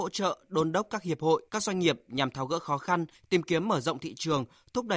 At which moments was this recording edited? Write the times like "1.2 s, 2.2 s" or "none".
1.5 s, 3.1 s